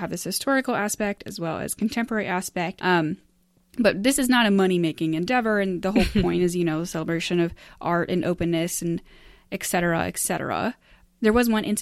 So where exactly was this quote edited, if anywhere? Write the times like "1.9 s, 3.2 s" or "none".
2.8 s

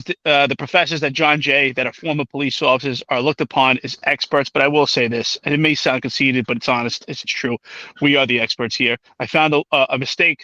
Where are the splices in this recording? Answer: 7.2 s

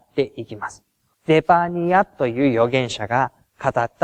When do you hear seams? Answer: 1.1 s

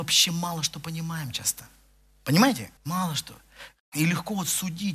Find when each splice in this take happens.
2.8 s

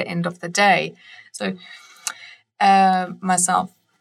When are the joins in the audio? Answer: 1.4 s

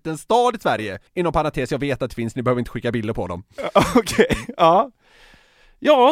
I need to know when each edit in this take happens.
1.1 s

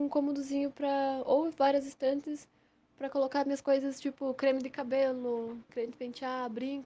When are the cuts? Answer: 5.7 s

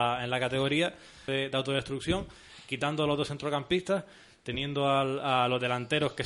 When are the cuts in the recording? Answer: 1.3 s

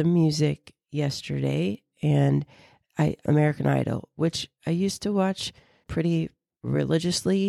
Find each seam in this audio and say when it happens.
3.2 s, 5.8 s

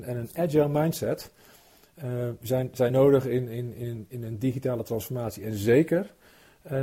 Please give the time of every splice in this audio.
none

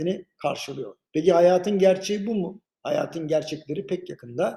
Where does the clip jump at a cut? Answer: 1.0 s, 2.6 s

